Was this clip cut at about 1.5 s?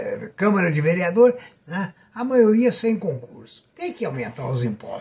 yes; 2 cuts; at 1.5 s, 3.7 s

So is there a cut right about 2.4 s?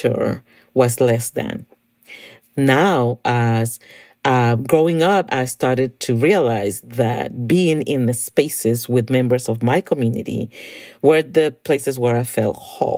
no; 1 cut; at 5.3 s

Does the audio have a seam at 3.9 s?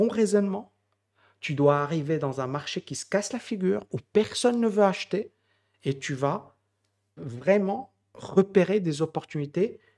no; 1 cut; at 7.2 s

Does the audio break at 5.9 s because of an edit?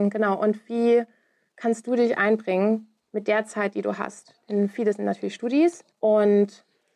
yes; 1 cut; at 5.9 s

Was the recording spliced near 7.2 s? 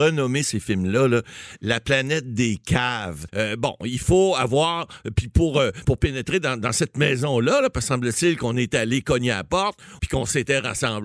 no; 3 cuts; at 3.3 s, 5.8 s, 10.0 s

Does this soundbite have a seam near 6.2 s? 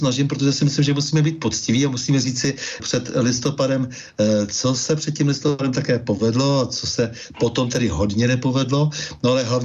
no; 1 cut; at 2.8 s

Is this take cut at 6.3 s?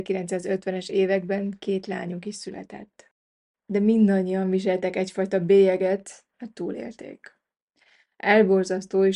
yes; 2 cuts; at 3.5 s, 6.3 s

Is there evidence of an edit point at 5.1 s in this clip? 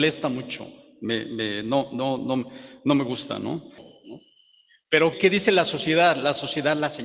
yes; 2 cuts; at 3.8 s, 5.1 s

